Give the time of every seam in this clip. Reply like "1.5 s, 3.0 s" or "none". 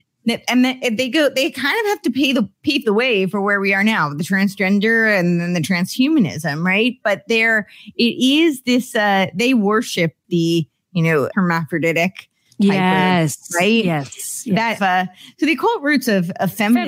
10.2 s, 11.3 s, 14.8 s